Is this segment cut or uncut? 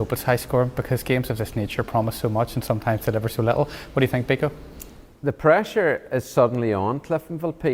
uncut